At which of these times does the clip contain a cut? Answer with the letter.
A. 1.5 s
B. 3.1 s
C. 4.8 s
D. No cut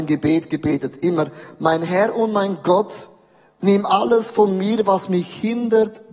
D